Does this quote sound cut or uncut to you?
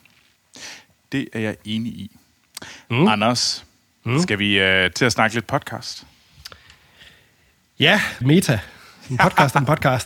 cut